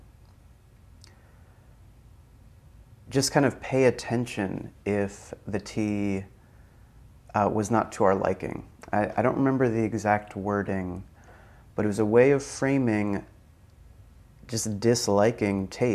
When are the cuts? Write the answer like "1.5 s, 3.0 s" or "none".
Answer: none